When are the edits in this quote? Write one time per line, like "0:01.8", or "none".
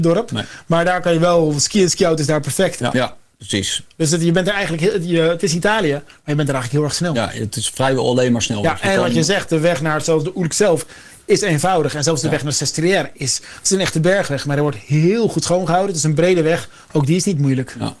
0:02.9